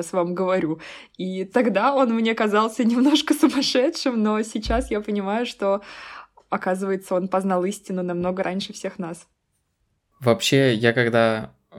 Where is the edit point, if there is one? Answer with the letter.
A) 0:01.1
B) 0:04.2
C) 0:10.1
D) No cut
C